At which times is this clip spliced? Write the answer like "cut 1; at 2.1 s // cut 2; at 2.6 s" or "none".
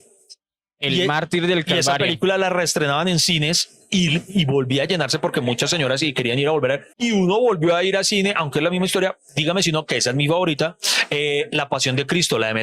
cut 1; at 6.9 s